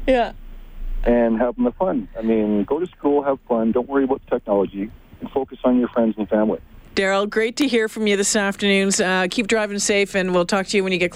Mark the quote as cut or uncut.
uncut